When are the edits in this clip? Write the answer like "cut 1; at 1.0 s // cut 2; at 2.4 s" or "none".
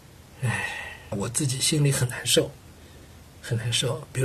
cut 1; at 1.1 s